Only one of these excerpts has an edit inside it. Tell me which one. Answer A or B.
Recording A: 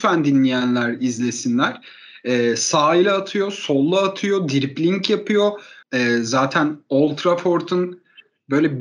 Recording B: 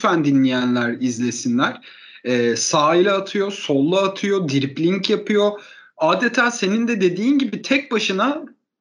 A